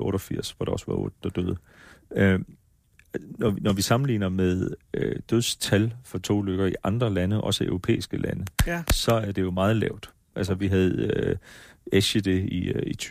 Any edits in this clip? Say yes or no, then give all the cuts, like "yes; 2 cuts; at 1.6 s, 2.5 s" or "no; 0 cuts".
no; 0 cuts